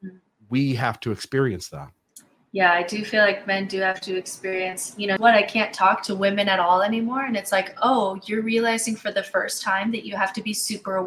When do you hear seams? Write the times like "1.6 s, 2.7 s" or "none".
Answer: 5.2 s